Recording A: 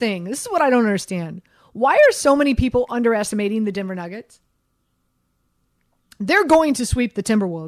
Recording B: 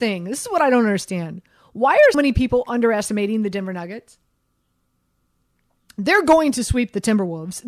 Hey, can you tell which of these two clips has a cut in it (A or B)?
B